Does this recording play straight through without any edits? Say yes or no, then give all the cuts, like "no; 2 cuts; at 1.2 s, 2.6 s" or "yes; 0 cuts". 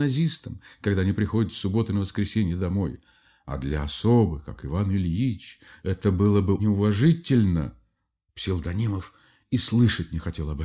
no; 2 cuts; at 6.6 s, 8.2 s